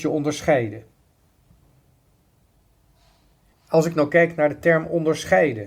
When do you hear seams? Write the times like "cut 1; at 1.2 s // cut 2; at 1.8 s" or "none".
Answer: cut 1; at 3.5 s

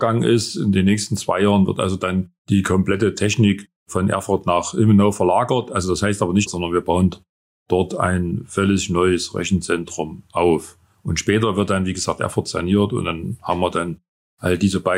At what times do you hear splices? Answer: cut 1; at 2.4 s // cut 2; at 6.5 s

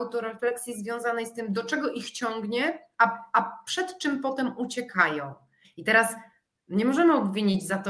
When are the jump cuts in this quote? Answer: cut 1; at 5.6 s

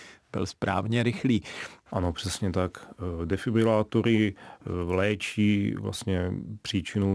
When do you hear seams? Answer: cut 1; at 1.9 s

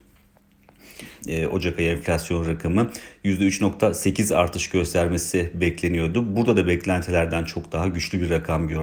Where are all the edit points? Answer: cut 1; at 1.2 s

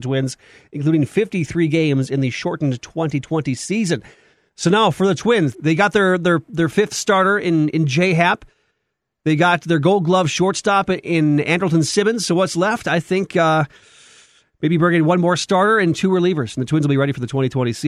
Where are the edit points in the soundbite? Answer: cut 1; at 5.5 s

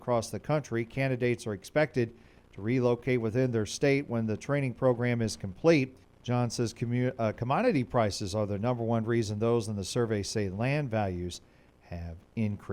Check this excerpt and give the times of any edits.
cut 1; at 6.0 s

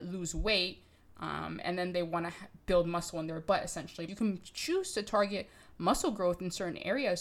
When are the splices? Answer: cut 1; at 4.1 s

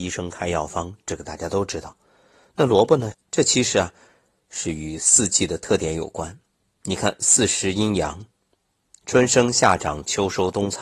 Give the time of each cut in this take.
cut 1; at 3.1 s

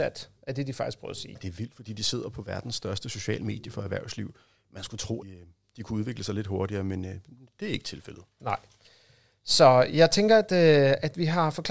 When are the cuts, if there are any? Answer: cut 1; at 5.2 s

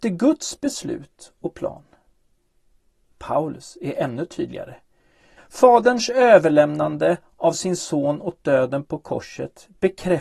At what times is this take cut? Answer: cut 1; at 5.4 s

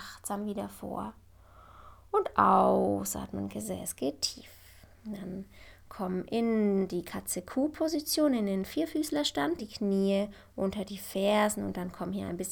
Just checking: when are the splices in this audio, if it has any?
cut 1; at 4.9 s // cut 2; at 9.6 s

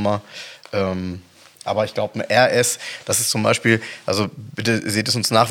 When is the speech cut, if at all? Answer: none

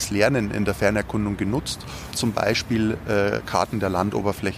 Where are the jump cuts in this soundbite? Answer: cut 1; at 2.1 s

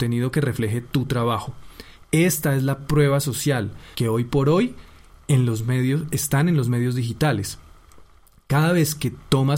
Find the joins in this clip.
cut 1; at 3.9 s

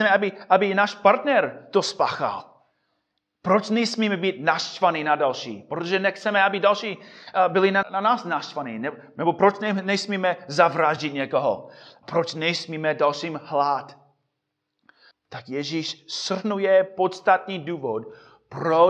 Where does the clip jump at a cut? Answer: cut 1; at 7.8 s // cut 2; at 12.0 s // cut 3; at 15.1 s

